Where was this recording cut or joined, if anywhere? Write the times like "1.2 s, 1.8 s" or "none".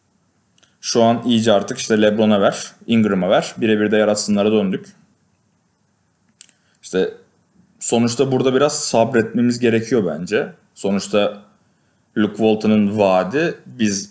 none

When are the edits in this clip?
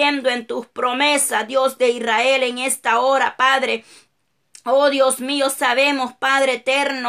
none

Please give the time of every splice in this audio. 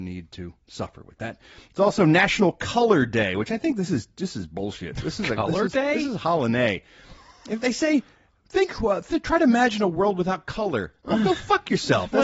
none

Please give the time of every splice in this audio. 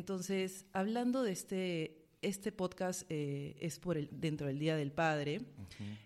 4.1 s

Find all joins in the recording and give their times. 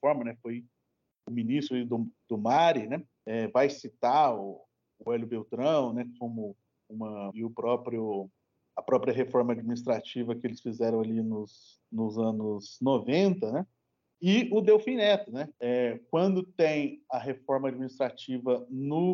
7.3 s, 15.5 s

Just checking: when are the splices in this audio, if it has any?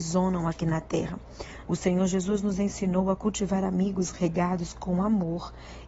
1.6 s

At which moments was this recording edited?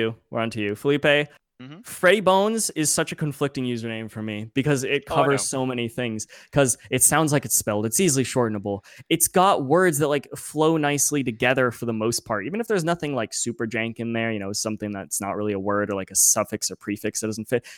none

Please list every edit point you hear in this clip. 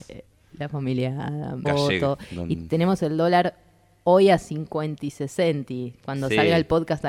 1.6 s

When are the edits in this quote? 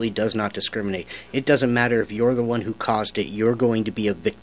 none

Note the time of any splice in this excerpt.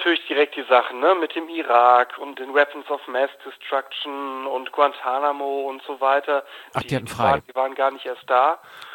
2.3 s, 6.7 s

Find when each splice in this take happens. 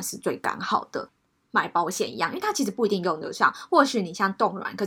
1.3 s

